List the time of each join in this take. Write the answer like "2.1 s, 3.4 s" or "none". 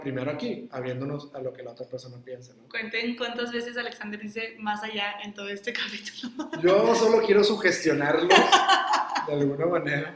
none